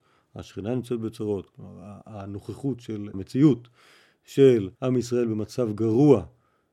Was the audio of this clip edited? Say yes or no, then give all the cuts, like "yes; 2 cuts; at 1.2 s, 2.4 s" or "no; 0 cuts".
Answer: yes; 2 cuts; at 3.1 s, 4.7 s